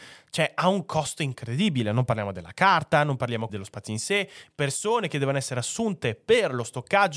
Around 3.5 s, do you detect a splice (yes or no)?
yes